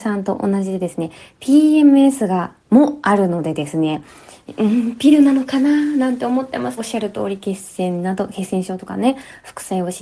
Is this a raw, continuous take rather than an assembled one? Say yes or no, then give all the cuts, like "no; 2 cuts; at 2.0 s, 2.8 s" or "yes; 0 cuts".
no; 1 cut; at 6.8 s